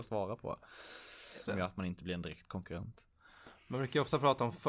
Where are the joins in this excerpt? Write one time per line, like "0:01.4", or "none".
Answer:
0:01.5